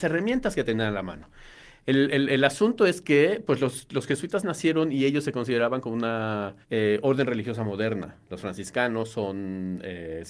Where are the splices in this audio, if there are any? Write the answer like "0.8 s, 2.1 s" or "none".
6.6 s